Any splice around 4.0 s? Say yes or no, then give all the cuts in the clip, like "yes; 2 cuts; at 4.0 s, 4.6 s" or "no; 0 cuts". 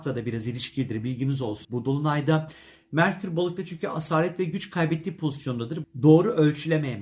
no; 2 cuts; at 1.6 s, 5.8 s